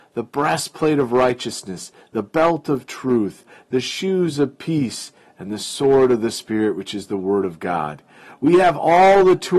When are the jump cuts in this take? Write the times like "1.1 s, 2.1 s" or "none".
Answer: none